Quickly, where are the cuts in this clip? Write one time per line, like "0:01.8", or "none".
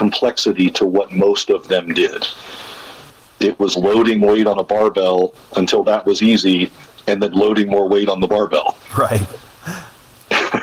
none